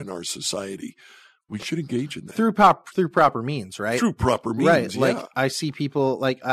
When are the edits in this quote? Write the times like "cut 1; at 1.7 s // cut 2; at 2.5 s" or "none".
none

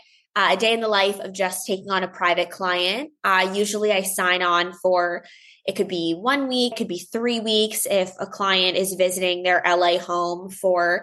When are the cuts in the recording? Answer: cut 1; at 6.7 s

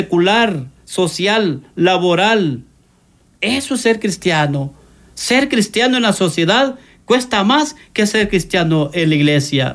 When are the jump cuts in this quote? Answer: none

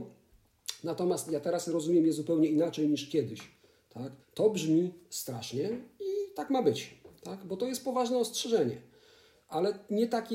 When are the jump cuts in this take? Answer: cut 1; at 4.2 s

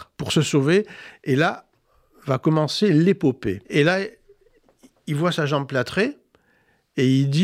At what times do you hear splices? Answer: cut 1; at 3.6 s

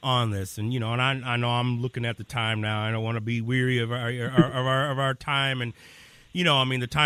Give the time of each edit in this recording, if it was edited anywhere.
none

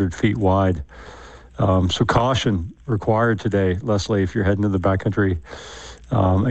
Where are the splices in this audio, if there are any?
none

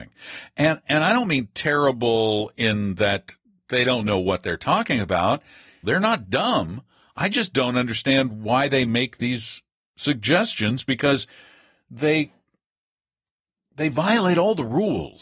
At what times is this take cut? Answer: cut 1; at 5.8 s

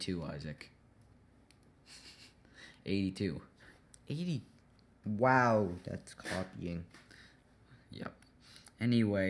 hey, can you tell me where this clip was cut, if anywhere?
none

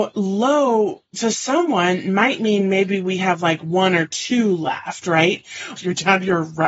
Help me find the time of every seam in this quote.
cut 1; at 5.8 s

